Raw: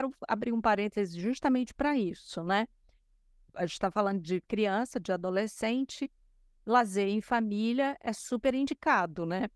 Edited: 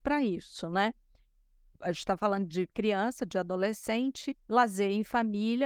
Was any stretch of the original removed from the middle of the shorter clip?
yes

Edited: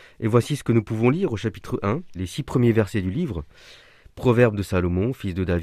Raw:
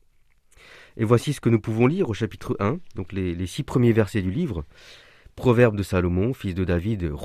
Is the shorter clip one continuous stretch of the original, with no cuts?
no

